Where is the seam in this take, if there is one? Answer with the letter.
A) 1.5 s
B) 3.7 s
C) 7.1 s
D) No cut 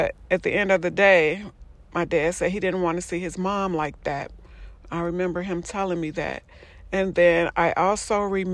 D